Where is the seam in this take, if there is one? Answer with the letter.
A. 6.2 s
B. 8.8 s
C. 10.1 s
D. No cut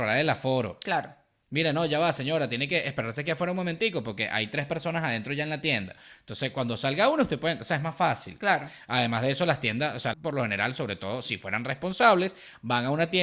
C